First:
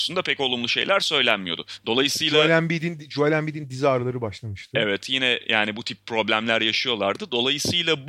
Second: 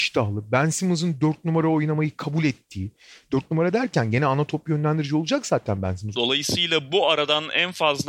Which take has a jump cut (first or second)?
second